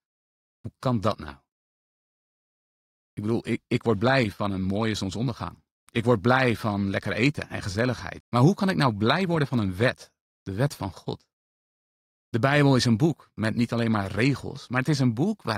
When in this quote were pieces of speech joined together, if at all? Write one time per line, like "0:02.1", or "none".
0:08.2
0:12.1